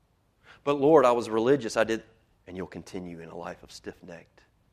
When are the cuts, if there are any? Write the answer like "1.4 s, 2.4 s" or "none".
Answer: 2.4 s